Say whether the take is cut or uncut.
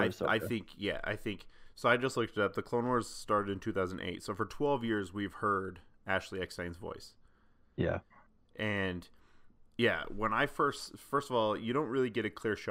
uncut